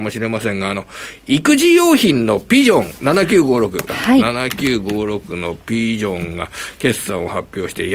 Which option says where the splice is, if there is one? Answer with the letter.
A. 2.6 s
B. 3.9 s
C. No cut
B